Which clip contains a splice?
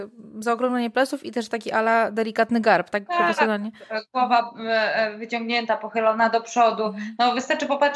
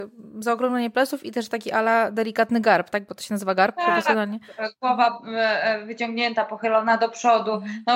first; 1 cut; at 3.1 s

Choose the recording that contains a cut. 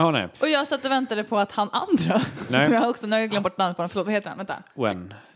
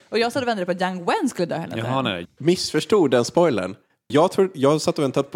second; 2 cuts; at 2.3 s, 4.1 s

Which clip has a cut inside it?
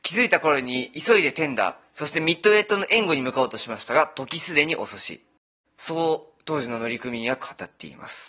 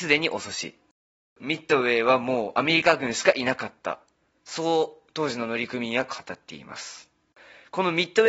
first; 1 cut; at 5.6 s

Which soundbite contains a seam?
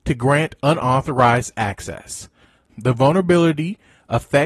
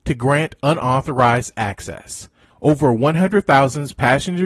second; 1 cut; at 2.5 s

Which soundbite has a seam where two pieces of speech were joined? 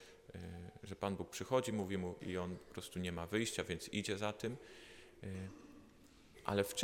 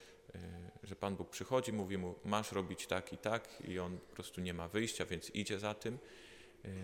first; 1 cut; at 2.2 s

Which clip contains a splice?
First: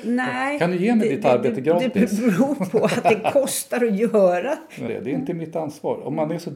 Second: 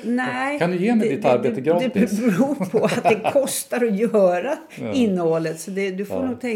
first; 1 cut; at 4.9 s

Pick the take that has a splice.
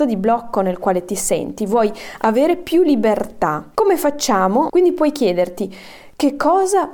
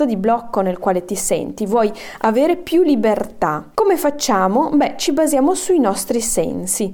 first; 1 cut; at 4.7 s

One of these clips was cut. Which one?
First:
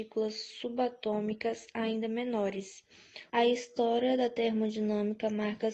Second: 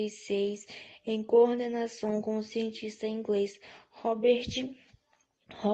first; 1 cut; at 3.3 s

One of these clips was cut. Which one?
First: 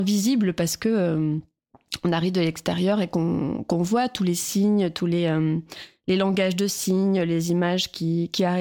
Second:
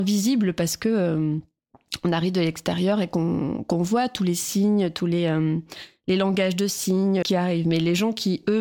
second; 1 cut; at 7.2 s

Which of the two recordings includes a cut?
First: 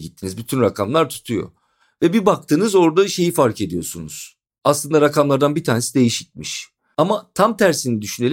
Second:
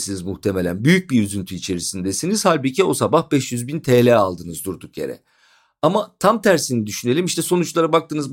first; 1 cut; at 6.9 s

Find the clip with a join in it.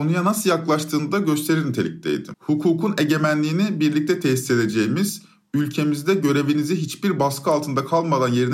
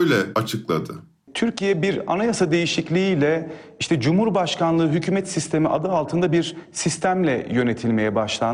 first; 1 cut; at 2.3 s

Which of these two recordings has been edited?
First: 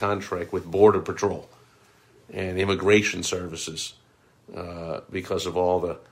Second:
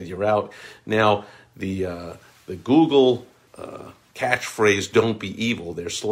second; 1 cut; at 3.5 s

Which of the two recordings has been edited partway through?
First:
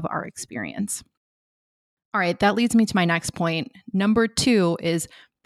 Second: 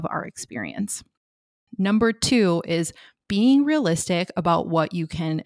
second; 1 cut; at 1.7 s

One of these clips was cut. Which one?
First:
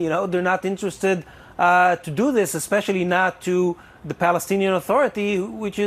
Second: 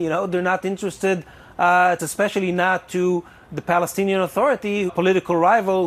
second; 2 cuts; at 2.0 s, 4.9 s

